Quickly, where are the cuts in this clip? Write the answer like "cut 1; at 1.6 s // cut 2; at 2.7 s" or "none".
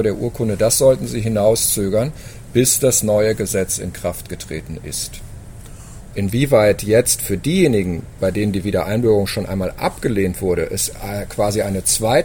cut 1; at 6.1 s